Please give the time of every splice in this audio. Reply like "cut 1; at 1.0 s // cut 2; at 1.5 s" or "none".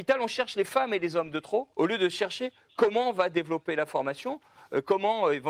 cut 1; at 1.7 s